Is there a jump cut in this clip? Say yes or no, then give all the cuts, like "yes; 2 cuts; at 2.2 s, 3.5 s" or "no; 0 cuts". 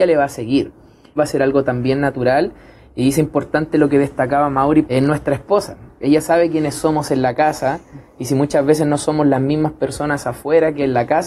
yes; 2 cuts; at 1.2 s, 4.9 s